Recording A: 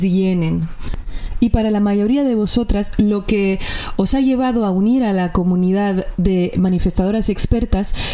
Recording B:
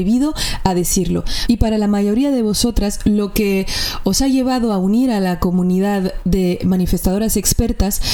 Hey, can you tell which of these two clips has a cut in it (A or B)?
B